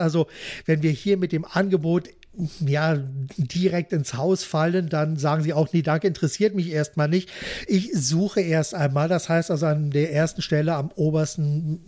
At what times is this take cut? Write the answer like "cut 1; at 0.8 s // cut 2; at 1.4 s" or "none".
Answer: none